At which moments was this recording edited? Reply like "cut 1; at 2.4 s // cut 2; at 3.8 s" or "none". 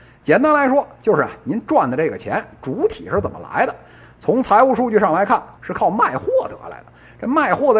cut 1; at 5.6 s